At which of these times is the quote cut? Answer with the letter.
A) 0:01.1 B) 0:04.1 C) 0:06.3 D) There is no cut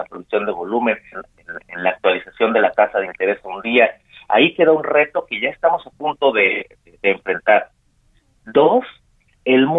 A